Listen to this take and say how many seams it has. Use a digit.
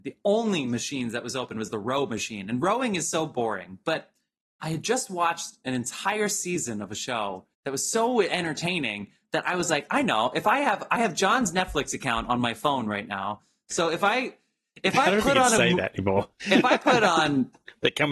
1